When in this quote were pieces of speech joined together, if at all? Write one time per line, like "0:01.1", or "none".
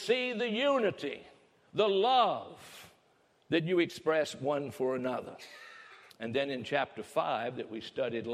0:06.1